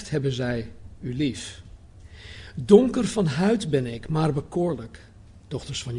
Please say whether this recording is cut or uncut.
uncut